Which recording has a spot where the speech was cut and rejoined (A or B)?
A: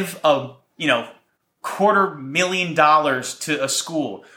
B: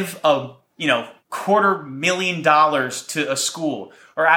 B